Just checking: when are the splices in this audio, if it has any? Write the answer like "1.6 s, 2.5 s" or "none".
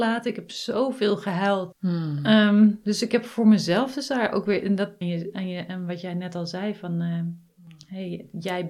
1.7 s, 5.0 s

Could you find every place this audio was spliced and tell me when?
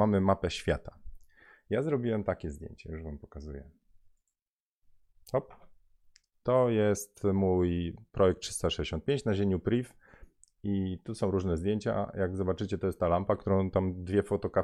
none

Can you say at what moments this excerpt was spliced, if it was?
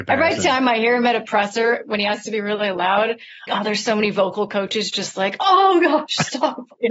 3.5 s

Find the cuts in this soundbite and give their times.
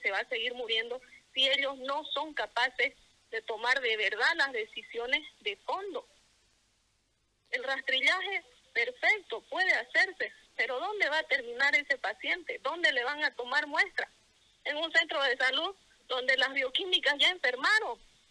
none

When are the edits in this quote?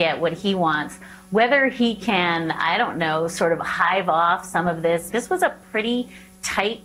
5.1 s

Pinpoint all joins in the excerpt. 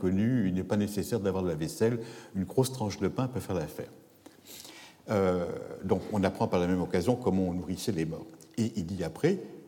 none

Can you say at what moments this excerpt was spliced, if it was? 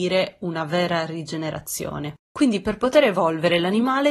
2.3 s

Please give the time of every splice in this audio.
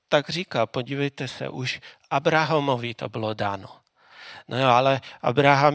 none

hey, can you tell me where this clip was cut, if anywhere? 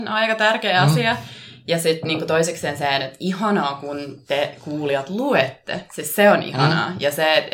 none

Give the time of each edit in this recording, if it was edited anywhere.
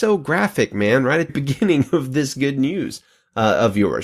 1.3 s

